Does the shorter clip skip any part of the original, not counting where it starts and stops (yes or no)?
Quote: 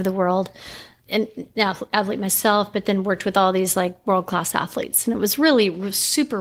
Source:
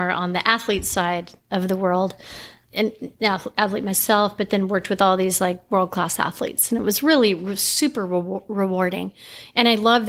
no